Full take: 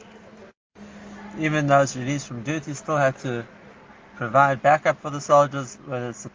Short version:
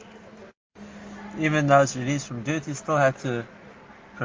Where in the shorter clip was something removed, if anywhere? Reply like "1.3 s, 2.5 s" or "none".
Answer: none